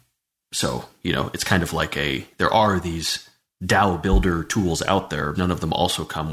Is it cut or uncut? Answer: cut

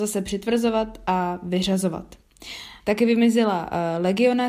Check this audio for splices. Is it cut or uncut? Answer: cut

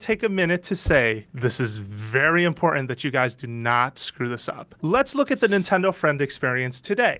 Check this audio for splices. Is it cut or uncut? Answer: cut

